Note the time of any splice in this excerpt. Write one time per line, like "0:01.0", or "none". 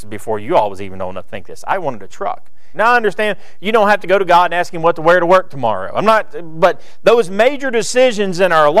0:02.7